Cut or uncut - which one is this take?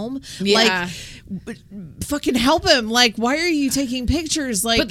uncut